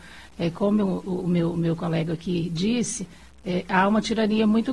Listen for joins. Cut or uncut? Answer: uncut